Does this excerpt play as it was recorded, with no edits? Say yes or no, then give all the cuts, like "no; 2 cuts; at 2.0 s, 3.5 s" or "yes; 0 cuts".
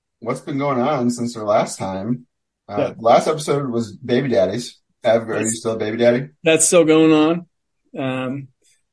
no; 1 cut; at 4.9 s